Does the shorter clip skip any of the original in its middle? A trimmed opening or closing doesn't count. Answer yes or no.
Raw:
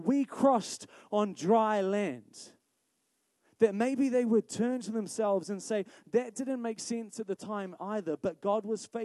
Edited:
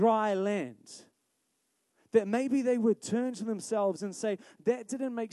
no